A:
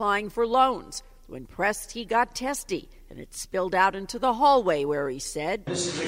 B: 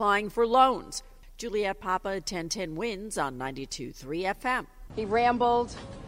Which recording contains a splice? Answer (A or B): B